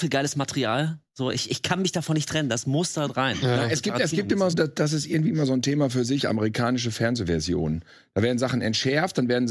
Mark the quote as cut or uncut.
cut